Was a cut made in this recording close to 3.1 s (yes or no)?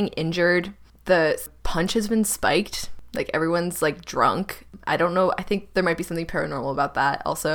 no